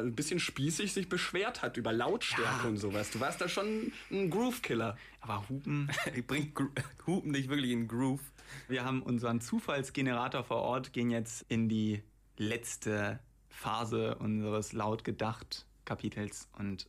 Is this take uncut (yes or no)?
no